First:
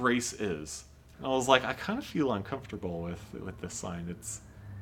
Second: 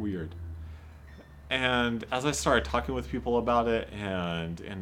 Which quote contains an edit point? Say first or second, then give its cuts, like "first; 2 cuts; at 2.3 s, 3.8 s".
first; 1 cut; at 1.1 s